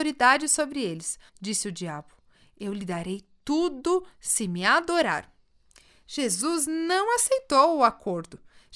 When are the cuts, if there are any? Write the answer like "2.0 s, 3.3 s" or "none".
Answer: 1.3 s